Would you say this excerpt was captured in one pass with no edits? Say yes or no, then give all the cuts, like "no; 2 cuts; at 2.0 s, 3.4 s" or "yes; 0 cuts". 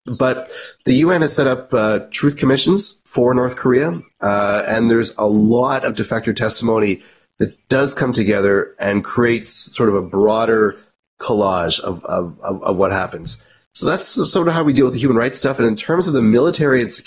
yes; 0 cuts